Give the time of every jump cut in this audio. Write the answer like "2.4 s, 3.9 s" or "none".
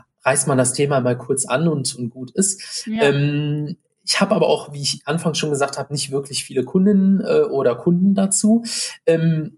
none